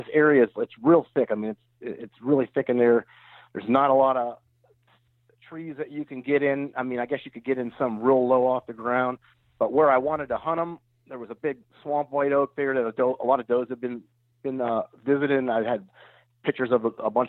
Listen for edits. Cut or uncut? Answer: uncut